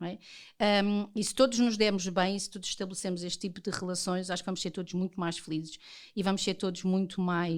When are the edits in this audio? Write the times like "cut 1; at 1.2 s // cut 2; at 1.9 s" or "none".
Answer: none